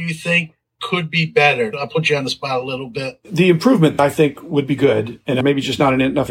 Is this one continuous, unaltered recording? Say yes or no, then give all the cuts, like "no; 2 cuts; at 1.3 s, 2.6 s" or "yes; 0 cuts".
yes; 0 cuts